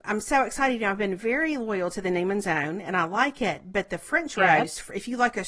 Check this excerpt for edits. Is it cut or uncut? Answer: uncut